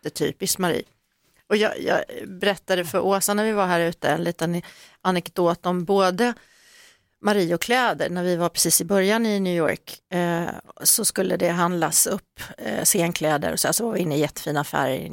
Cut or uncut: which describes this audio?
uncut